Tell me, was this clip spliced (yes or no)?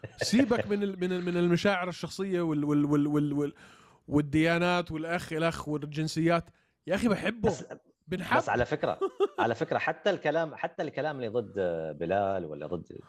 no